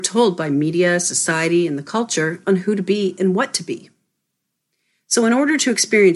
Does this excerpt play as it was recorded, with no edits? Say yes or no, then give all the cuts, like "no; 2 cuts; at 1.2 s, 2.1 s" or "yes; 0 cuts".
yes; 0 cuts